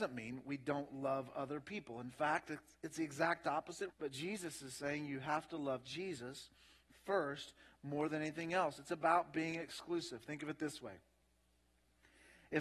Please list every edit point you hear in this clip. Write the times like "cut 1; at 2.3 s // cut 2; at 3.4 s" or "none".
cut 1; at 3.9 s